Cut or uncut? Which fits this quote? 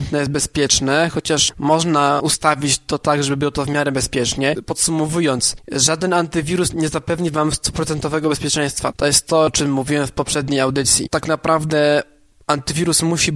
uncut